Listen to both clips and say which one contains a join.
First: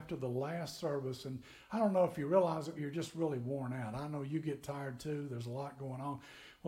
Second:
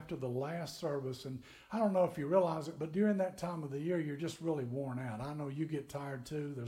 first; 1 cut; at 2.8 s

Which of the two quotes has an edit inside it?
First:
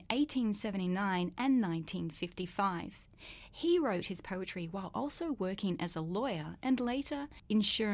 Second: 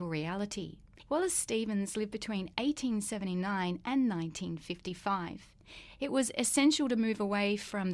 second; 2 cuts; at 1.1 s, 6.0 s

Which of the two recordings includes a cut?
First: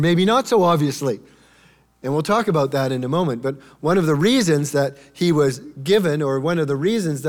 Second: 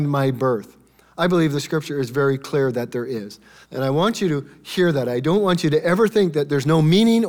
second; 1 cut; at 3.6 s

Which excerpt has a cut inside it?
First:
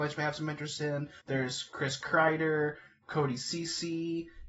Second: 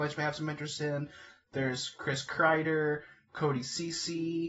first; 1 cut; at 1.2 s

